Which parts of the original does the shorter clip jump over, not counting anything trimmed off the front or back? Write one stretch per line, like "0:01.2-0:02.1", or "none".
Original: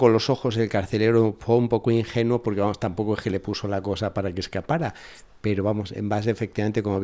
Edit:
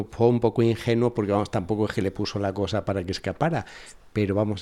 none